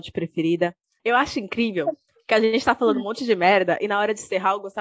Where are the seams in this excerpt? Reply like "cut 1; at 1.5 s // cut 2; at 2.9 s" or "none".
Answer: cut 1; at 1.0 s